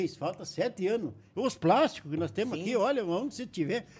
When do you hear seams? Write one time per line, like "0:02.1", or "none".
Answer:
0:01.3